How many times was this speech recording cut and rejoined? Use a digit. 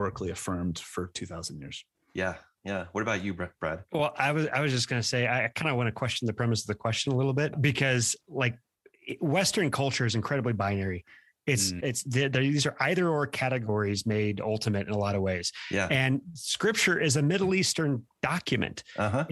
1